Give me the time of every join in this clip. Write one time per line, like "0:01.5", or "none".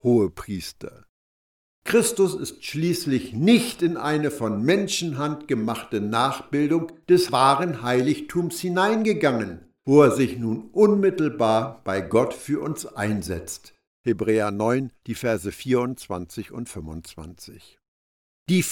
0:09.8
0:13.9